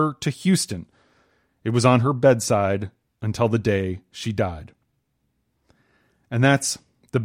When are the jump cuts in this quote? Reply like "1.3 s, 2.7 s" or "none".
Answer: none

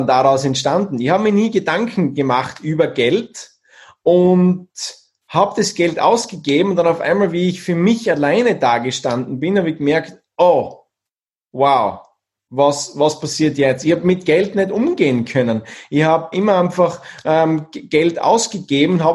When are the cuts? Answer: 16.3 s

